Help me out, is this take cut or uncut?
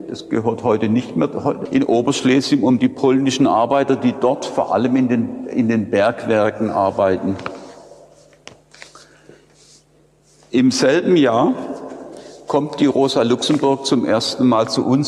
cut